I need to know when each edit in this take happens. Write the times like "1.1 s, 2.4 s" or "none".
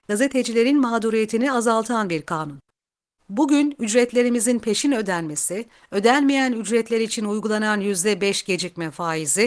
3.2 s